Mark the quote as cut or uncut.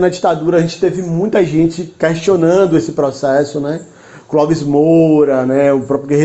uncut